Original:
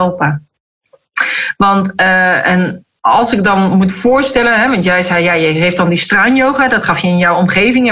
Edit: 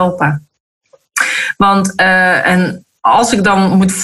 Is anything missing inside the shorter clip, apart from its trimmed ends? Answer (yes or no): no